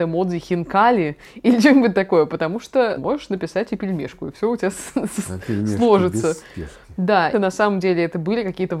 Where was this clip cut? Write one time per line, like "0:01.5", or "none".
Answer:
0:03.0
0:07.3